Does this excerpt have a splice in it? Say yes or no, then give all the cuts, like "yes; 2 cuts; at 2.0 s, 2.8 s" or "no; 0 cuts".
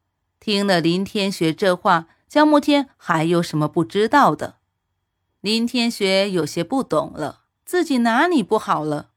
yes; 2 cuts; at 5.4 s, 7.6 s